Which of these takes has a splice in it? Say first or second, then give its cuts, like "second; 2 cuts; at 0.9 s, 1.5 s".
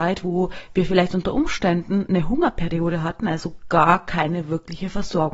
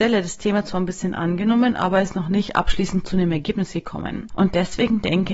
second; 1 cut; at 4.3 s